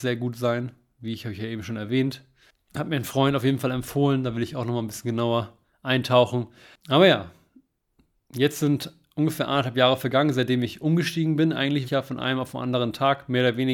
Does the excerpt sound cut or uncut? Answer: cut